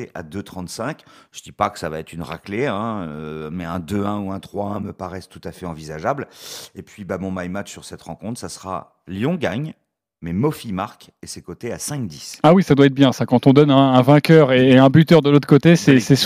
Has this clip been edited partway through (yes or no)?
no